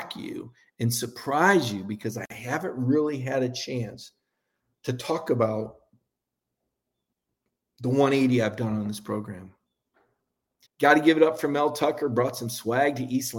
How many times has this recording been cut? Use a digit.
1